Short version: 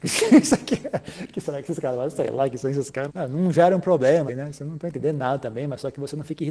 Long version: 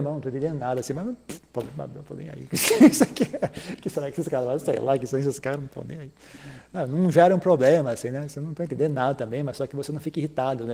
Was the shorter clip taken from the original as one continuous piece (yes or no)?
no